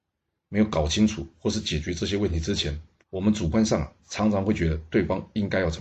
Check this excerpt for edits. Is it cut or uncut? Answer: cut